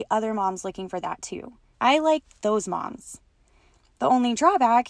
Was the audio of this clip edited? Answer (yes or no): yes